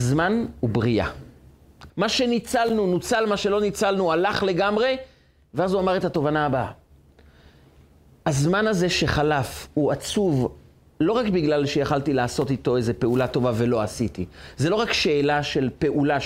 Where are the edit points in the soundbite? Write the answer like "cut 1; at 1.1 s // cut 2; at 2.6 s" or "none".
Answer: cut 1; at 1.9 s